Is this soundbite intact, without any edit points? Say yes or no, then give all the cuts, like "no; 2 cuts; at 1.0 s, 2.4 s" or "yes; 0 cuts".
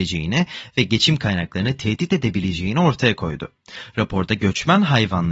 yes; 0 cuts